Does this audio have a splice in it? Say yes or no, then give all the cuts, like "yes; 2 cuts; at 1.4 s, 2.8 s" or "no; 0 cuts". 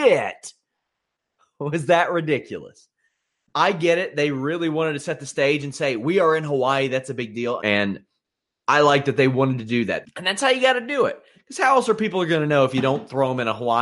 yes; 2 cuts; at 7.6 s, 10.0 s